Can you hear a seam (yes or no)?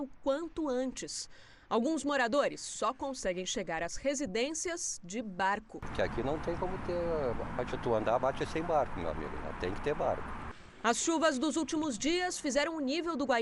no